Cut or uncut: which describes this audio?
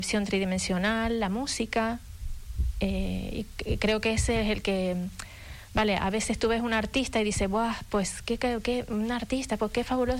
uncut